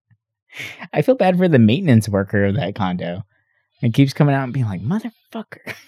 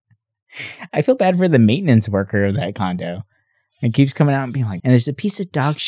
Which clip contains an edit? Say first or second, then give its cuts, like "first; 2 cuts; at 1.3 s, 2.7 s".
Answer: second; 1 cut; at 4.8 s